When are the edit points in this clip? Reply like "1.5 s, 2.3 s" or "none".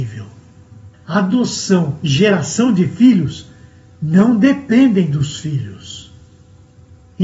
0.9 s